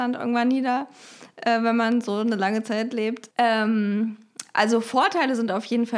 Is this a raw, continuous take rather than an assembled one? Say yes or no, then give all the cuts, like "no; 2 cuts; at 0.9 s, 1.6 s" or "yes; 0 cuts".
no; 1 cut; at 3.3 s